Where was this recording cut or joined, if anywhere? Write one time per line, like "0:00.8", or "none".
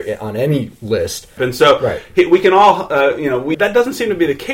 0:01.4
0:03.5